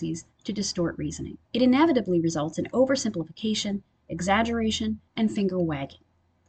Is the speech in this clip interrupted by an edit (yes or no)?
yes